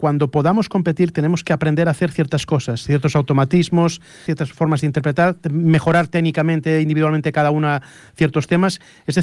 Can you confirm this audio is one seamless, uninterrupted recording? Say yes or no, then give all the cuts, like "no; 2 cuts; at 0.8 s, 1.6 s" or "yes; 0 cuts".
no; 1 cut; at 4.3 s